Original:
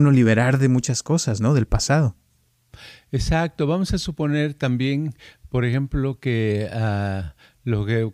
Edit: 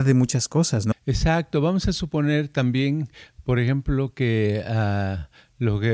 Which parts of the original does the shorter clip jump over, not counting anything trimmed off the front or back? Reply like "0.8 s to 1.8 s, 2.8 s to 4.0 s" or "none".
1.5 s to 3.0 s